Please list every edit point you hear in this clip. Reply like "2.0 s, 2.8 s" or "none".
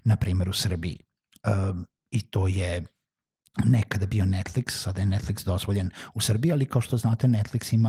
none